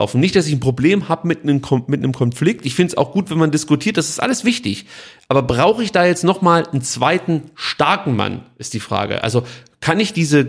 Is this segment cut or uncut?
uncut